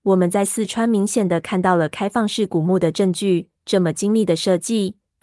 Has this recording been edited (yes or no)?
no